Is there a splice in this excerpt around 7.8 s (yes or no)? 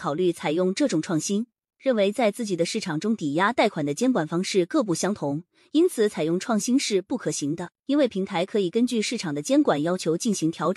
yes